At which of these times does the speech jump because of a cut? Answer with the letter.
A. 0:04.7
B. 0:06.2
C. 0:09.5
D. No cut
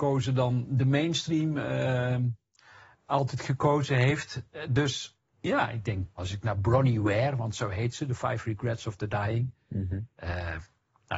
B